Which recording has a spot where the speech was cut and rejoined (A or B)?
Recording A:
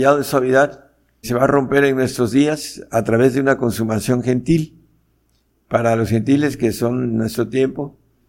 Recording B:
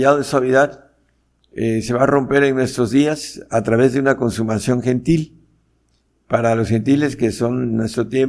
A